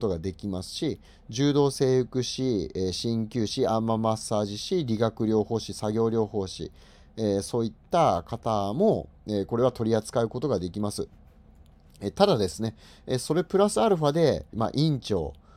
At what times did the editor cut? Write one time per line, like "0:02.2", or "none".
0:14.5